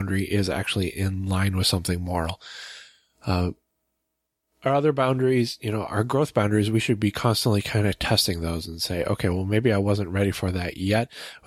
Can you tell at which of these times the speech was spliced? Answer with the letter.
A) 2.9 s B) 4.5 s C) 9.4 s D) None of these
D